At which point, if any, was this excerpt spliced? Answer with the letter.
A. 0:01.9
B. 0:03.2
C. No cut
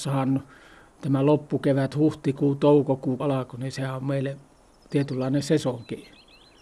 B